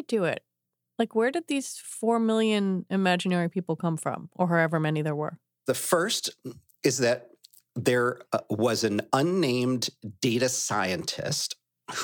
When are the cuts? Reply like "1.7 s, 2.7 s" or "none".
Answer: 5.7 s